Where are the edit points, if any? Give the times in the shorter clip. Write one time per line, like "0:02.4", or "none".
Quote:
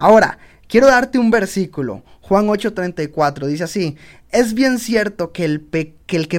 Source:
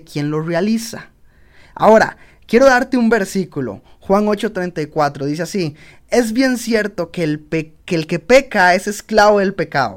none

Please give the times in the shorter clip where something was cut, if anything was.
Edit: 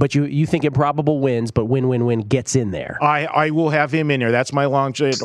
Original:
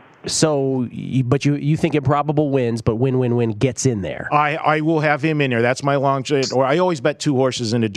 none

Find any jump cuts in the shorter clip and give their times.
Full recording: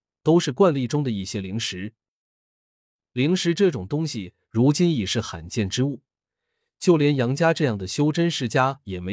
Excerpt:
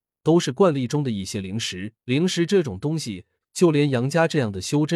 0:02.0
0:03.4

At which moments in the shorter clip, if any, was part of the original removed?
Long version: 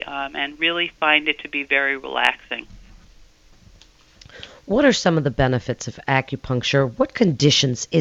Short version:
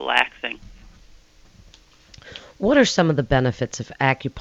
none

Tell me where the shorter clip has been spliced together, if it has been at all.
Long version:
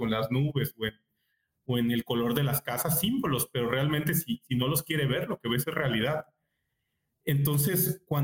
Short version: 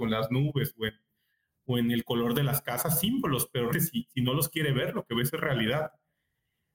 0:03.7

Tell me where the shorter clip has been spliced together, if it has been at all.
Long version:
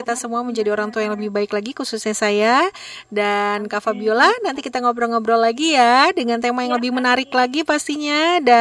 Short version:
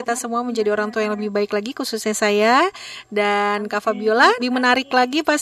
0:04.4

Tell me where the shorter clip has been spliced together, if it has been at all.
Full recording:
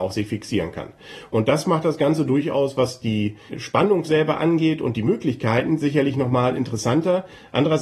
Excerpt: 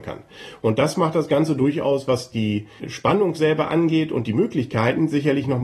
none

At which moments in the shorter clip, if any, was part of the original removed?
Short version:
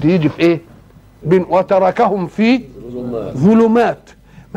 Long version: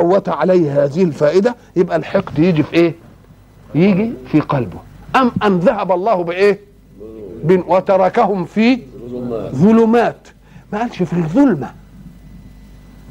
0:01.2

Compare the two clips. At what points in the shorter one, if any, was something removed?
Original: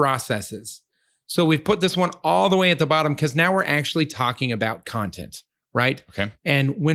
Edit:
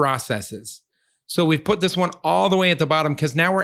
none

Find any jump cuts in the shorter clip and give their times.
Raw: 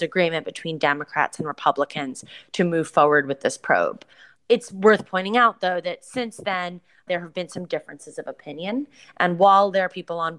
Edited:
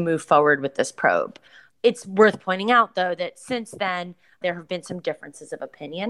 none

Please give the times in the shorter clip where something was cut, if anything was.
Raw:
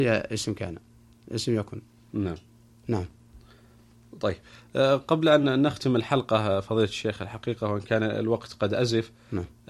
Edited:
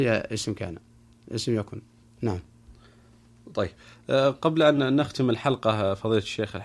0:02.0

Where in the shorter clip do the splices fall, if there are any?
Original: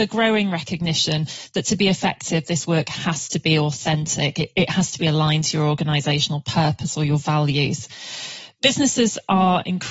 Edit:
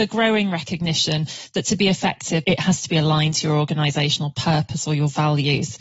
0:02.4

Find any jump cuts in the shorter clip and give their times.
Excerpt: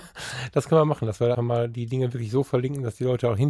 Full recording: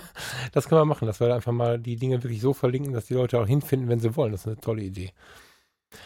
0:01.3

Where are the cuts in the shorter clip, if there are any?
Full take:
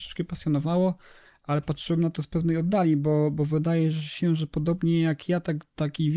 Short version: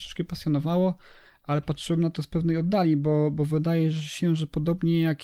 none

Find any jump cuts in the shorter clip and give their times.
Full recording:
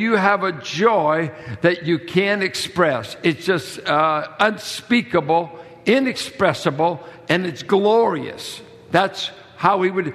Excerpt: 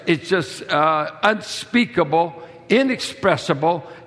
none

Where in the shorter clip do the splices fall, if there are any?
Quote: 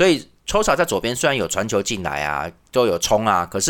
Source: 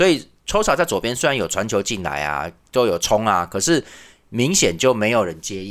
none

